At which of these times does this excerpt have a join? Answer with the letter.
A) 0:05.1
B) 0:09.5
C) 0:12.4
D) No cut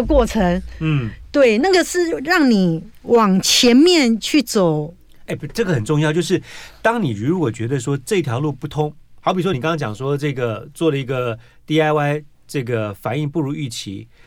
D